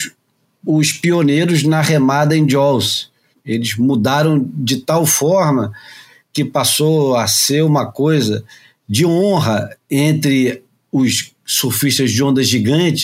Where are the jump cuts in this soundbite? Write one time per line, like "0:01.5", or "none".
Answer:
0:03.3